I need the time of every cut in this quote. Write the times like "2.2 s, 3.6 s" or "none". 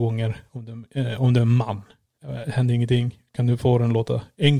none